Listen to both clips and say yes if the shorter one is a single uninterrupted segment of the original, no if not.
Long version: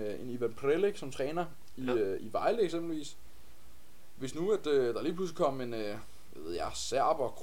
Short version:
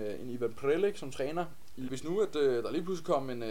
no